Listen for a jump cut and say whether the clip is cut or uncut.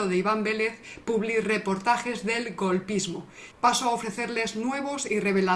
cut